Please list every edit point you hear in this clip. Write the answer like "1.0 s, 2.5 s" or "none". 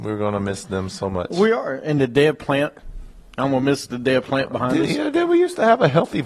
none